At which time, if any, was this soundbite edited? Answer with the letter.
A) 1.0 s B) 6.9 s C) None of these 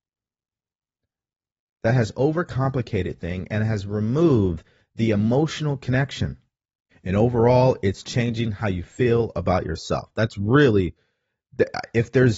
B